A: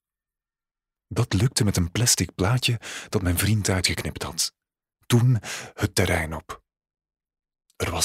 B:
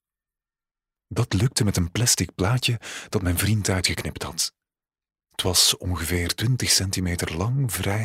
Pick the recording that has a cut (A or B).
A